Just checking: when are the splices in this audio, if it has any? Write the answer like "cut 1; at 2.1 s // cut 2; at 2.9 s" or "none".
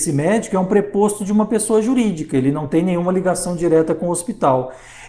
none